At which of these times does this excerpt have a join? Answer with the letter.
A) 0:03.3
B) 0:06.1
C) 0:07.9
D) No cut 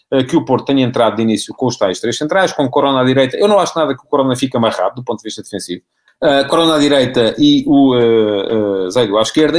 B